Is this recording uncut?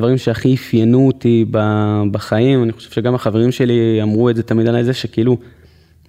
yes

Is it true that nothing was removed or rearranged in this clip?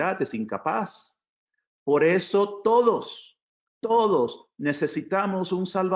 no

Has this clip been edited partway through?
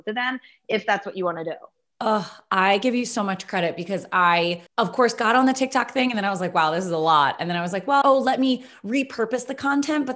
yes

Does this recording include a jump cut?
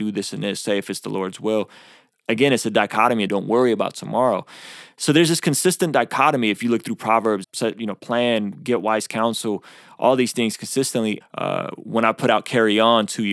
yes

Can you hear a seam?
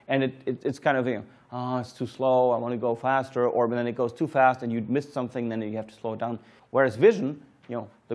yes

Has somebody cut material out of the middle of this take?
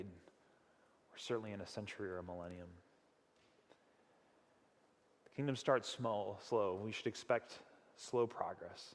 no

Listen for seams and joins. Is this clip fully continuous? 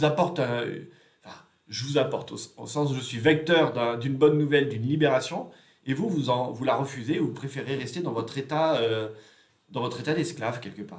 yes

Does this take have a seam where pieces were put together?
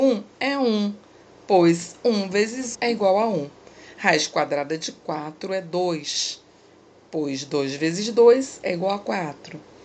yes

